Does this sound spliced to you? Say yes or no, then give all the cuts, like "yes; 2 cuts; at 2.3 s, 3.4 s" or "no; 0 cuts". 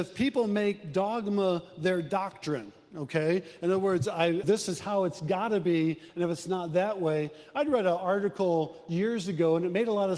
yes; 1 cut; at 4.4 s